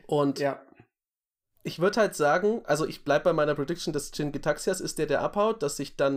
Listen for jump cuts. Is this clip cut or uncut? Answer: uncut